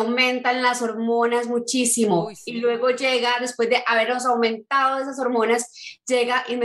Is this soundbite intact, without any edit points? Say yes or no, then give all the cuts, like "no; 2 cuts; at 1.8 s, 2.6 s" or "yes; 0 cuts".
yes; 0 cuts